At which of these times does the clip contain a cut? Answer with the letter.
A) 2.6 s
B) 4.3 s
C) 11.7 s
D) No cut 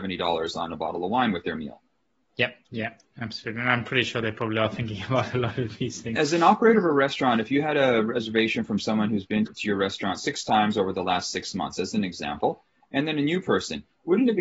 A